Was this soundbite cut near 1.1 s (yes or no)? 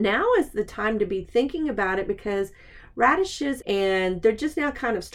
no